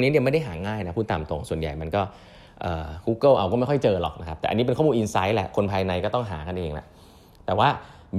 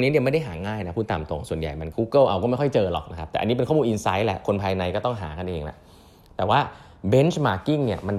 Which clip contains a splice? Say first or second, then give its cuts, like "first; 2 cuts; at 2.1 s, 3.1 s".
second; 1 cut; at 1.9 s